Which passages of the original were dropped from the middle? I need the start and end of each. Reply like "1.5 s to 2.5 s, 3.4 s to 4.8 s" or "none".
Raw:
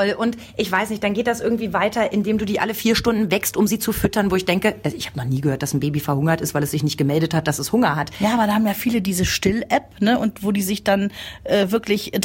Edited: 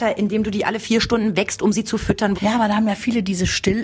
4.3 s to 8.1 s